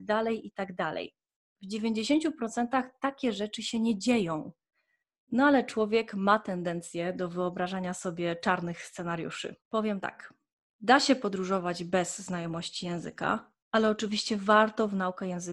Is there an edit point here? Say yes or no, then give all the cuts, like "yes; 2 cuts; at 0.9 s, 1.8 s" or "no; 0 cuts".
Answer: yes; 2 cuts; at 9.6 s, 13.6 s